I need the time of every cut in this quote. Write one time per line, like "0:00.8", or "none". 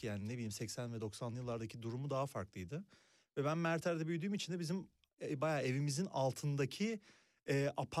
none